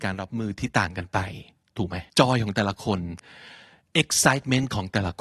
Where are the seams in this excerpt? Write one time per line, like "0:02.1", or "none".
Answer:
0:02.1